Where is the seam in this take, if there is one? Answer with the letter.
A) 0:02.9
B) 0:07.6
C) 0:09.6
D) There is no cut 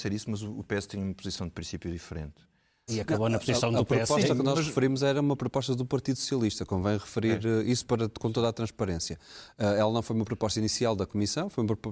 A